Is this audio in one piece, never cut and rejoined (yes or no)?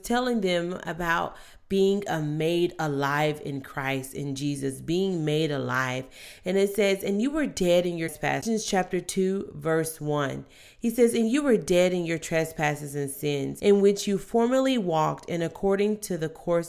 yes